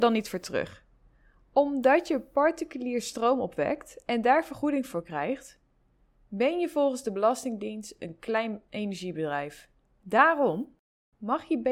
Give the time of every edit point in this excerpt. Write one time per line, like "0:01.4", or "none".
none